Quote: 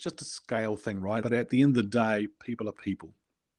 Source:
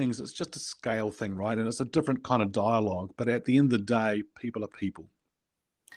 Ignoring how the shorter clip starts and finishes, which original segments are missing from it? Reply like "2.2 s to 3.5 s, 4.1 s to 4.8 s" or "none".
1.6 s to 3.2 s